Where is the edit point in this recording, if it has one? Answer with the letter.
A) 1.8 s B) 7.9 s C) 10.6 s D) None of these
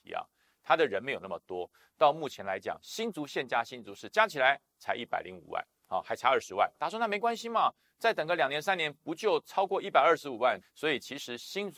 C